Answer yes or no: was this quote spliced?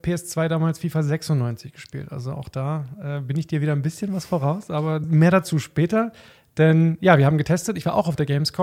no